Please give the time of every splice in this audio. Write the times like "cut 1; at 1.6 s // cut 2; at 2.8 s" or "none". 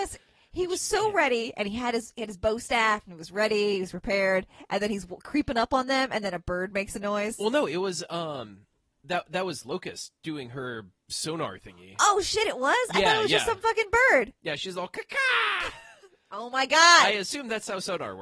none